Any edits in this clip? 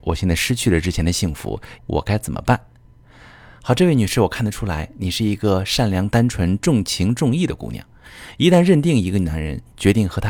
yes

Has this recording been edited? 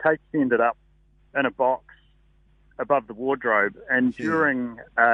no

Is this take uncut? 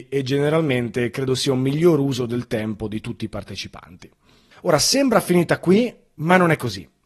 no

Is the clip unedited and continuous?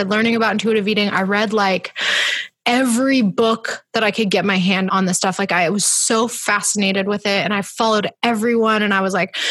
no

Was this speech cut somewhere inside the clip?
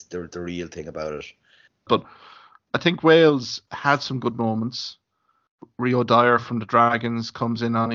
yes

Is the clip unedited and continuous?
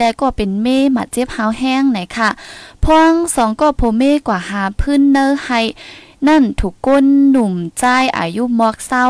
yes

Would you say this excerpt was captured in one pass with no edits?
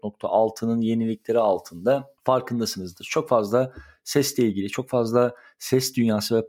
no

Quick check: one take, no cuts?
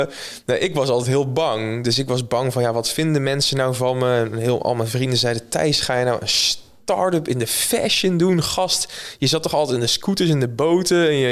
yes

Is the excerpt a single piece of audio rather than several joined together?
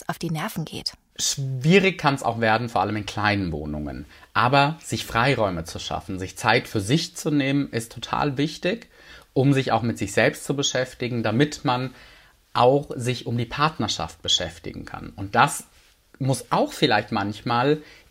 yes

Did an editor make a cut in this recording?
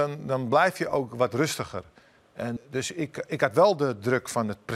yes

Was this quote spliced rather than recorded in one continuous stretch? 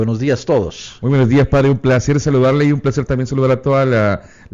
no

